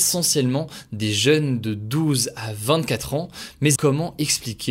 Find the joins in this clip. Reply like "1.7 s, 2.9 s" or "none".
3.8 s